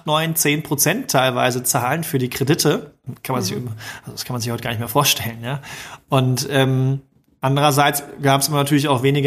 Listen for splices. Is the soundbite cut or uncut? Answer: uncut